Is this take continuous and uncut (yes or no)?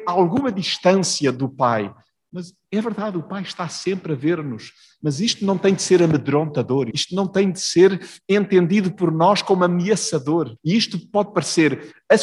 no